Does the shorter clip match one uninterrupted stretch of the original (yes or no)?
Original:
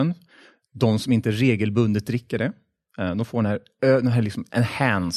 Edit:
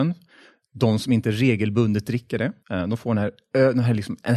no